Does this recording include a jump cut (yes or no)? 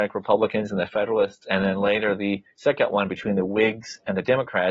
no